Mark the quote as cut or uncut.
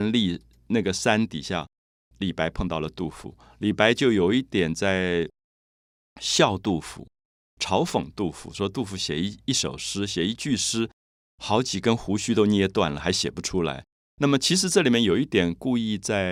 uncut